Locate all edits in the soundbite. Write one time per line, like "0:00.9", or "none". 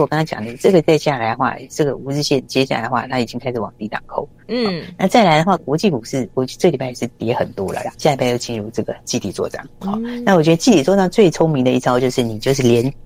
0:04.4
0:07.9